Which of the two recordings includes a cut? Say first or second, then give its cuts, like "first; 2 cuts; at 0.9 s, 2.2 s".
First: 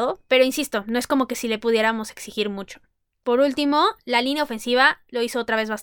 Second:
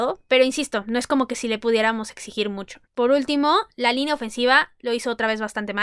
second; 1 cut; at 2.9 s